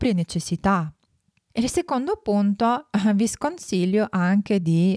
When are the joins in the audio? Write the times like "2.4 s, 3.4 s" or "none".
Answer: 1.5 s